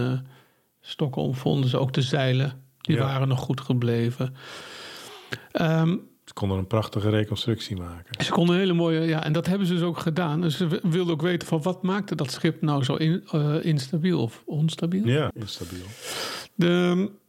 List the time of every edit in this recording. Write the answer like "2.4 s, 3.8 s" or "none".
15.3 s